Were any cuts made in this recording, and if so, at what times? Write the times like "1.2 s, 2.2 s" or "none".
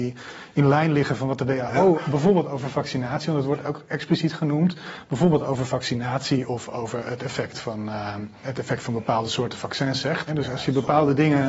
8.4 s, 10.3 s